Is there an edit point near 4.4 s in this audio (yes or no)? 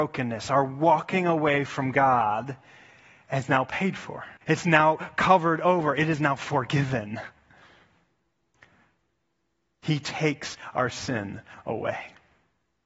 yes